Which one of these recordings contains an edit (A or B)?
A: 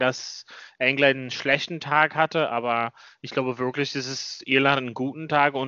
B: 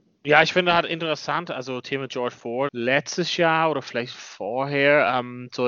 B